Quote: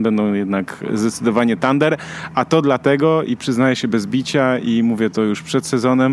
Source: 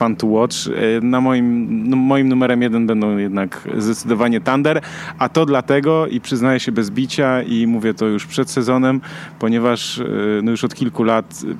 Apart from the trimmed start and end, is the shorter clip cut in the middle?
no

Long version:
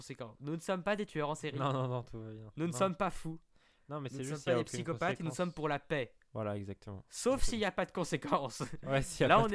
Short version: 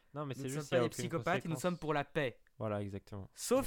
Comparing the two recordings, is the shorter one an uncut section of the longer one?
yes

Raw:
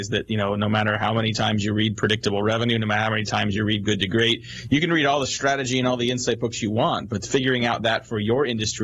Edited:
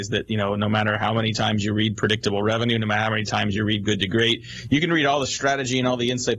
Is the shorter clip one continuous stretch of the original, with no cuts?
yes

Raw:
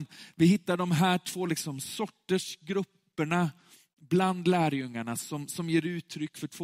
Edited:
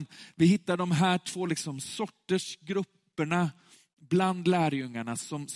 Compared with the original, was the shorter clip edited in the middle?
no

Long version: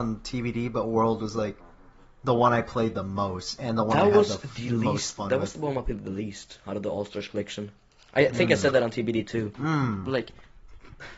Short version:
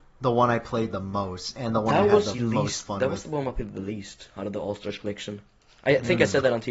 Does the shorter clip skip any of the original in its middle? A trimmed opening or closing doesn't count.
yes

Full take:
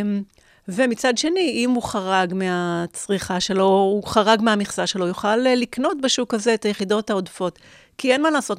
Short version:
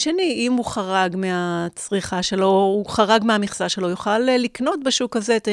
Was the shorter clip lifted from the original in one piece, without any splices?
yes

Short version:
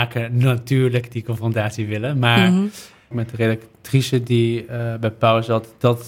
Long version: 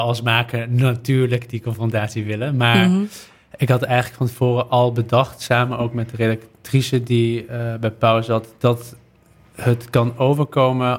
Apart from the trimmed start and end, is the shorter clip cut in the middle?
yes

